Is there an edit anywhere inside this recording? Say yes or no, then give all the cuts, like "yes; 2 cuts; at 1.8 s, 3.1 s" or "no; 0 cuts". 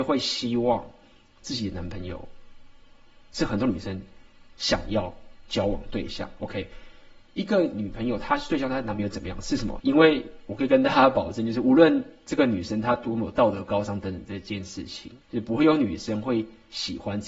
yes; 2 cuts; at 9.8 s, 15.2 s